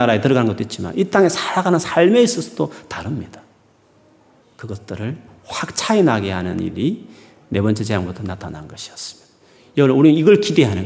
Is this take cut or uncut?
cut